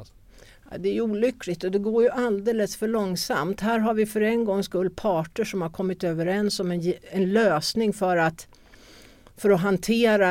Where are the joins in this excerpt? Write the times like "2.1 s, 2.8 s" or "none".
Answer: none